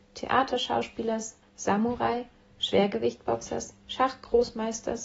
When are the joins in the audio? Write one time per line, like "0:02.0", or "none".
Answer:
0:01.4